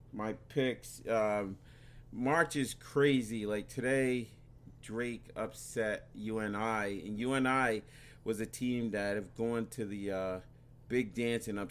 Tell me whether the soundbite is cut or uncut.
uncut